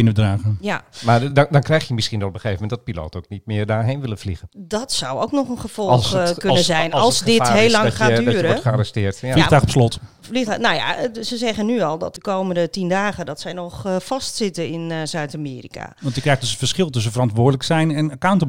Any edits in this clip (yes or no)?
no